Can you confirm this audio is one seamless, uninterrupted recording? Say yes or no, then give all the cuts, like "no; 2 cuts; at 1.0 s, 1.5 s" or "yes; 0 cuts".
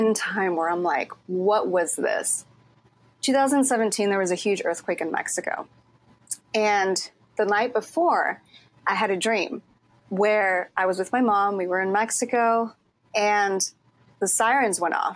yes; 0 cuts